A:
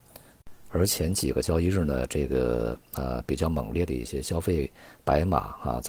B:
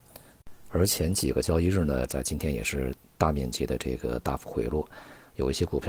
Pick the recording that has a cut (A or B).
B